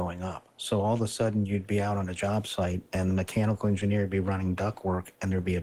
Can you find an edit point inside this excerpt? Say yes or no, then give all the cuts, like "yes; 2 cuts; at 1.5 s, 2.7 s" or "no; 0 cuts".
no; 0 cuts